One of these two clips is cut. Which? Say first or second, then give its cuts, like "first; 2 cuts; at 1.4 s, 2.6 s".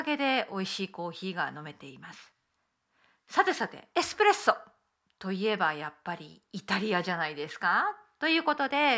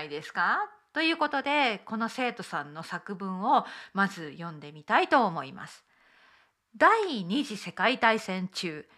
first; 1 cut; at 3.9 s